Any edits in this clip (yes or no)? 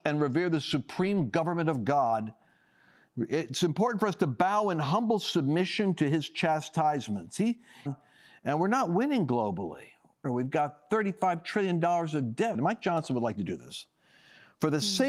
yes